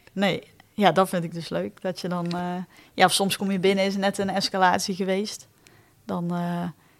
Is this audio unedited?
yes; 0 cuts

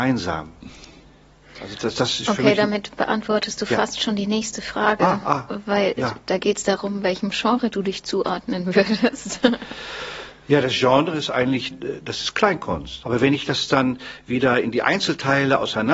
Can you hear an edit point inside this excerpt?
yes; 2 cuts; at 11.7 s, 13.0 s

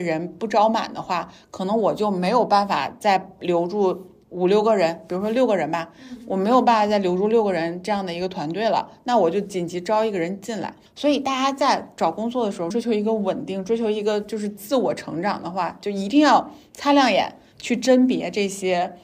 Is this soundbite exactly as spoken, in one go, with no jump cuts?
no; 2 cuts; at 10.9 s, 12.7 s

